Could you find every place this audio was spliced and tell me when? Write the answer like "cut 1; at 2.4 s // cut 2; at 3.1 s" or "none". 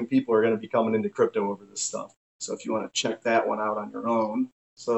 cut 1; at 2.3 s